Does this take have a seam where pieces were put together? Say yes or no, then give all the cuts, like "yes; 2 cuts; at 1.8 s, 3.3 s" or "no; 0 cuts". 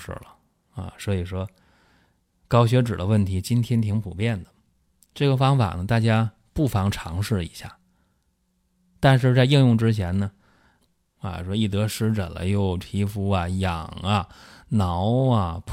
yes; 1 cut; at 10.8 s